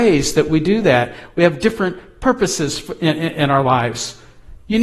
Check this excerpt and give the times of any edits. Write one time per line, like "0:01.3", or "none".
none